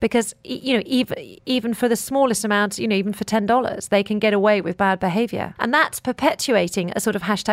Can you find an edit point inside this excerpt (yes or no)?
yes